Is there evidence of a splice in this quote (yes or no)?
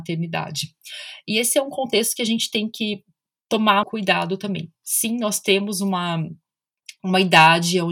yes